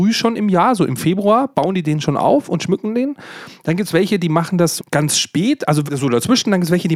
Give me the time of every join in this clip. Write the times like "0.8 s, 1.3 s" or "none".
4.8 s, 5.9 s

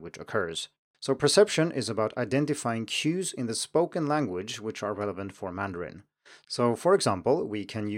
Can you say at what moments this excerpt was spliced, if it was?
0.9 s

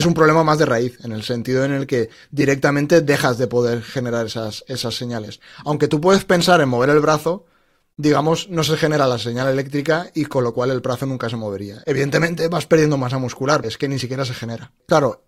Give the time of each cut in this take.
11.8 s, 13.6 s

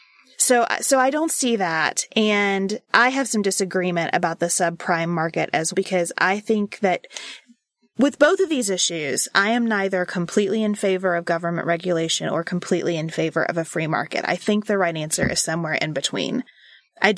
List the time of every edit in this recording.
5.7 s

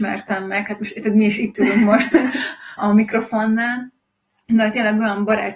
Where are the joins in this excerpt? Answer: 2.8 s

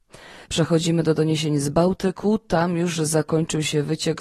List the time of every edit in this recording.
none

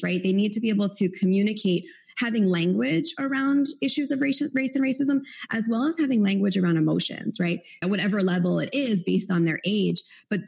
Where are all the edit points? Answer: 7.8 s

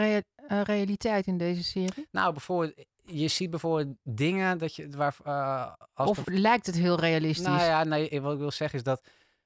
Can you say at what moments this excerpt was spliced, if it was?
none

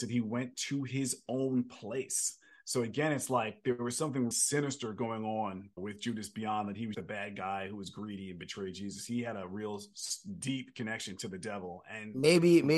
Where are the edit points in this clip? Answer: 4.3 s, 5.8 s, 6.9 s

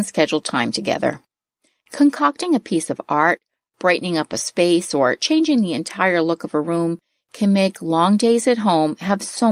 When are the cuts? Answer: none

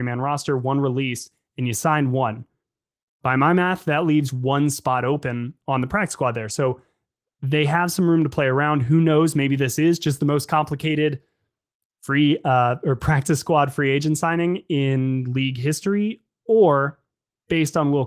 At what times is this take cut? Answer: none

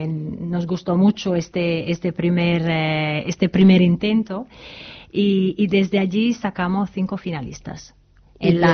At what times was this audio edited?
none

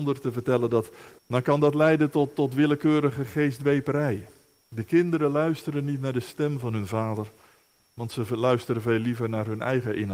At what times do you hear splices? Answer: 1.2 s, 4.6 s

